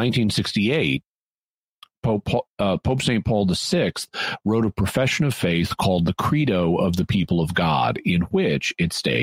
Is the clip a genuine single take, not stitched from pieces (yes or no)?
yes